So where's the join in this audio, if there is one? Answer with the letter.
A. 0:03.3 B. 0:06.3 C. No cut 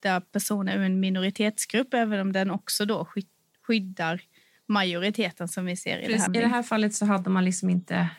B